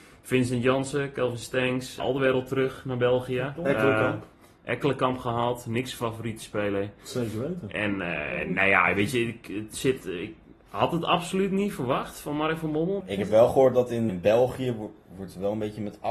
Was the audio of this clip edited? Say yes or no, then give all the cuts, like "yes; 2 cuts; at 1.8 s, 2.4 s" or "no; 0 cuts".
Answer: yes; 3 cuts; at 2.0 s, 13.0 s, 14.1 s